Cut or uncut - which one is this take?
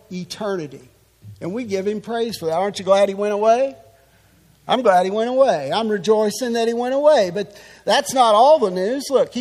uncut